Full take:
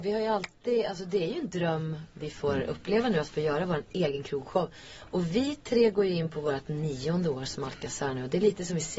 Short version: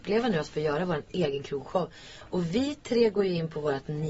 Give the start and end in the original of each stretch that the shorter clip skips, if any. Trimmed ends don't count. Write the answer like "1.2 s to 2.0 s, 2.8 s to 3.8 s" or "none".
none